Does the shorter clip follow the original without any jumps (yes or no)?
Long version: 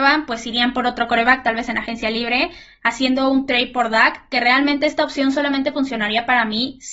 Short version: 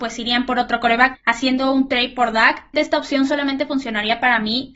no